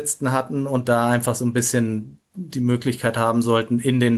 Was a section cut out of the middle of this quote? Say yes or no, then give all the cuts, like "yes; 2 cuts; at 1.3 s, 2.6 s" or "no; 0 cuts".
no; 0 cuts